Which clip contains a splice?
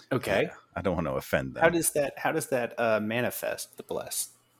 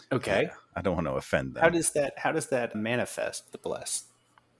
second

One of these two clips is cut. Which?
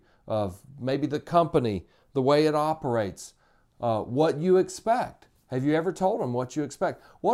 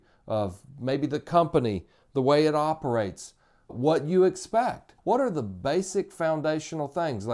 second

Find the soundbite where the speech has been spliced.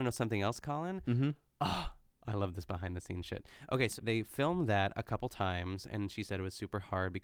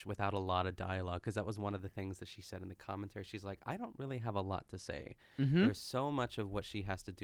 first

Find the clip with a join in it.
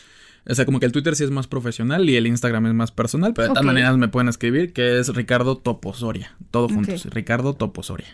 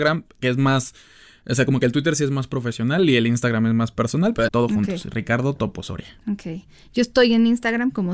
second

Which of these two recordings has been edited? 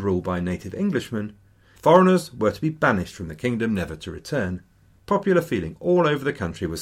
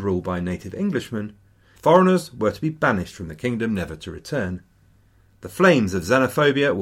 first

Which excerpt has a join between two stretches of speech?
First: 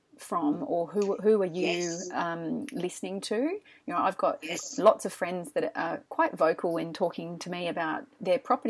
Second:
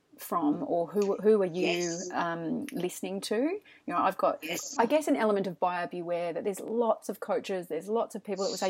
second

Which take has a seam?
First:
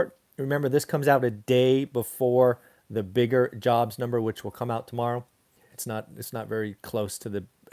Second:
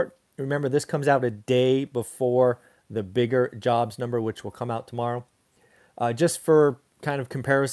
first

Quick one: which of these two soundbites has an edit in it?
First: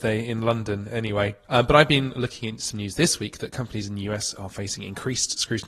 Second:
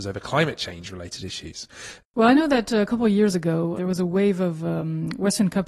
second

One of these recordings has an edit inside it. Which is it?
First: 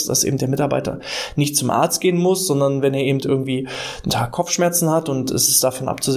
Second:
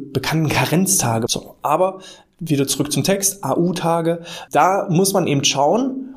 second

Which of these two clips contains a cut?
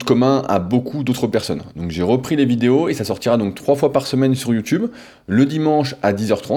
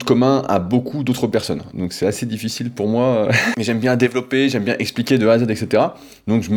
second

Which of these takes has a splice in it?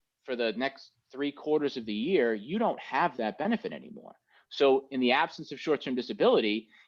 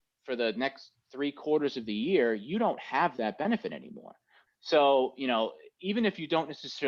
second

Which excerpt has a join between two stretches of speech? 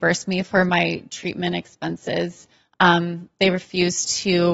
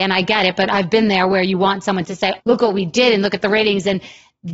second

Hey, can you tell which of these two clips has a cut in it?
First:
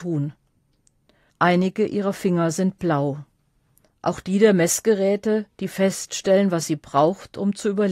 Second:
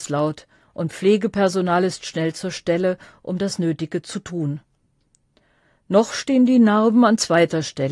first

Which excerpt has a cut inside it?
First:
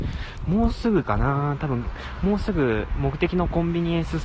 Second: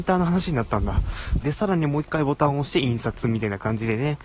second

